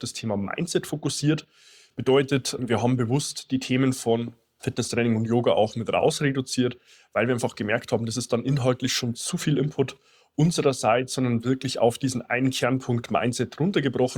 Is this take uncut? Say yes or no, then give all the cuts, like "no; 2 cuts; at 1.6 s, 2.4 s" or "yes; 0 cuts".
yes; 0 cuts